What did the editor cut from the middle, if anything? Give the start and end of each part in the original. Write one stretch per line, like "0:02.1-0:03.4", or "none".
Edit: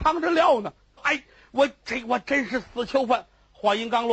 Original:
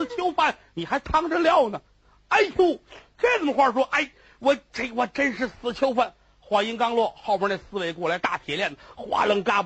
0:02.1-0:03.8